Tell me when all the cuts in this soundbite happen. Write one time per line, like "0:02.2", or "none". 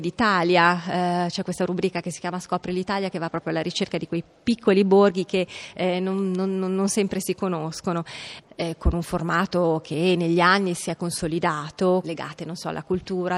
0:08.4
0:12.0

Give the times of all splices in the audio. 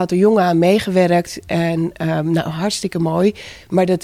none

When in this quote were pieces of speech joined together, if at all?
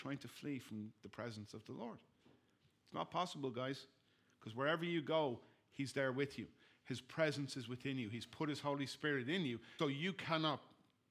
0:09.8

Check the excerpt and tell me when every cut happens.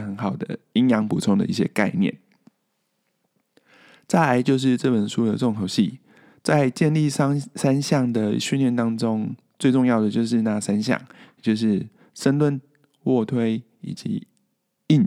none

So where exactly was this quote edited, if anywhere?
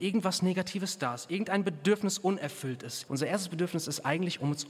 0:03.1

